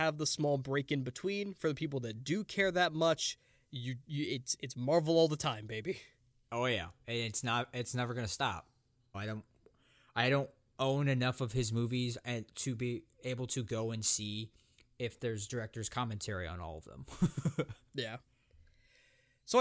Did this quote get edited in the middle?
yes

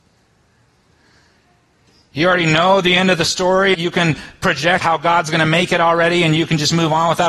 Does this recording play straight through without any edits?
no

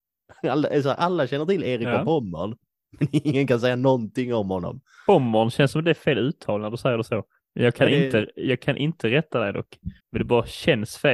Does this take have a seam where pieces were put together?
yes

